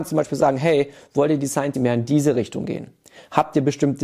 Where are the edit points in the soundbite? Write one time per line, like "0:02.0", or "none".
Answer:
0:01.7